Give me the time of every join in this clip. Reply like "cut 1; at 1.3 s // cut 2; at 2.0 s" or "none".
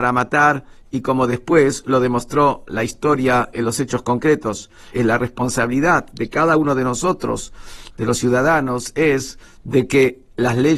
cut 1; at 4.9 s

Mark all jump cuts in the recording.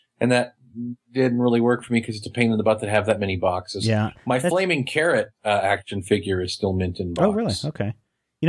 none

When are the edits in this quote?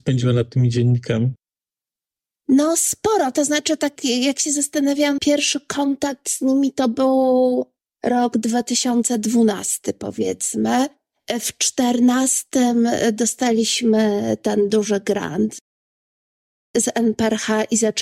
cut 1; at 5.2 s

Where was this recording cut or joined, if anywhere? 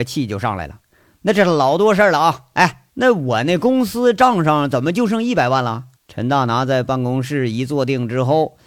cut 1; at 2.9 s // cut 2; at 6.0 s

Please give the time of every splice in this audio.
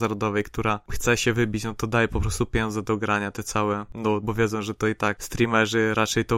cut 1; at 4.2 s

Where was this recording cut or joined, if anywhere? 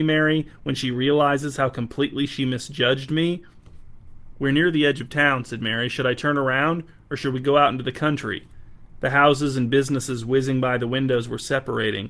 none

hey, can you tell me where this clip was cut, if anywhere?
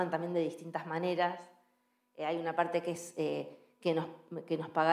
none

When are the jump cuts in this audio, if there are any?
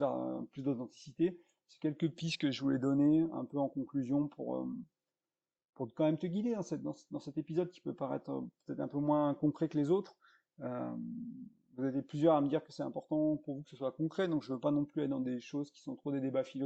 none

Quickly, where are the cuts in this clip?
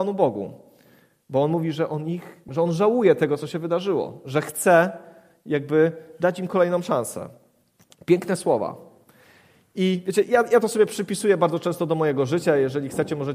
cut 1; at 2.5 s

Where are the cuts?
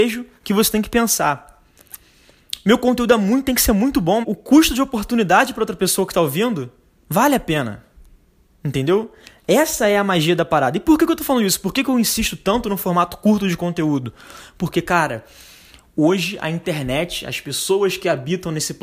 cut 1; at 4.2 s

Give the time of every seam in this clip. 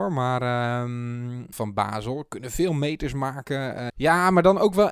cut 1; at 1.5 s // cut 2; at 3.9 s

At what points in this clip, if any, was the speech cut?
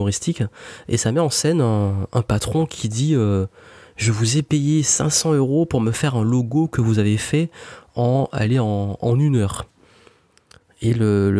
none

